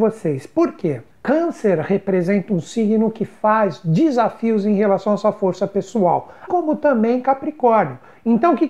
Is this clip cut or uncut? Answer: cut